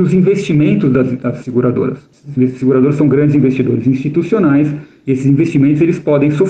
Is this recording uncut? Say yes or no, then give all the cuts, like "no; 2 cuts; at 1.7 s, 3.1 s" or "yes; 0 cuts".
yes; 0 cuts